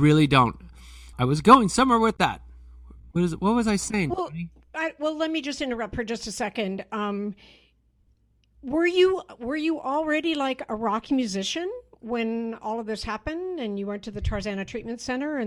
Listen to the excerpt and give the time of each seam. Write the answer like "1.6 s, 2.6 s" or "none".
1.1 s

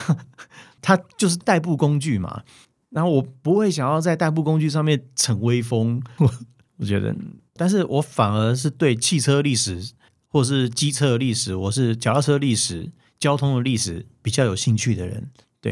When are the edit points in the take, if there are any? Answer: 6.2 s

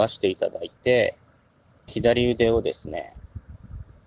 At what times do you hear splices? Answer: 1.9 s

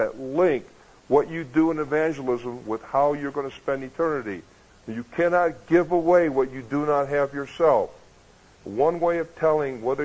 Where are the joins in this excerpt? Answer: 4.7 s, 8.5 s

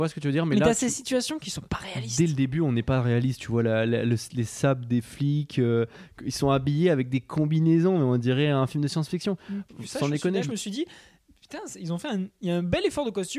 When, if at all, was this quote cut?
10.4 s

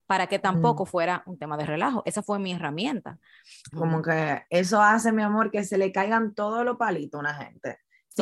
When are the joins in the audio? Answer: 3.7 s

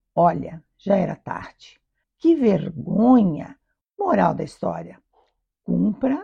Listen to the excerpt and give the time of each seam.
2.0 s, 3.8 s

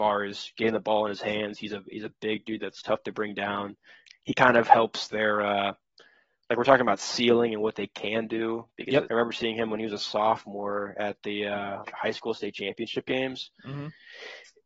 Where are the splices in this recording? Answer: 4.0 s, 9.1 s, 11.9 s

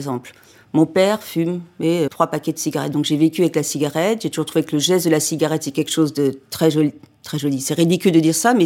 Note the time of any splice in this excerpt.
2.1 s

